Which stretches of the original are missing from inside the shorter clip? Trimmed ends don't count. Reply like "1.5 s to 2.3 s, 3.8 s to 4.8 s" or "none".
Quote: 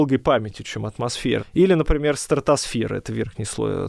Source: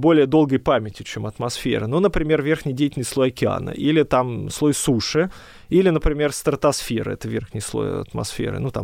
1.8 s to 5.5 s